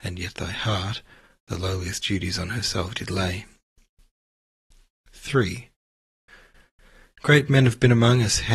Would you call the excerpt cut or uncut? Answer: uncut